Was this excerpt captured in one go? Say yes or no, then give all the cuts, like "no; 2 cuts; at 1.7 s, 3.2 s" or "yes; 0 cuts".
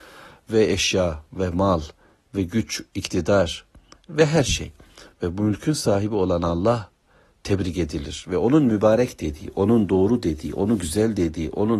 no; 1 cut; at 5.1 s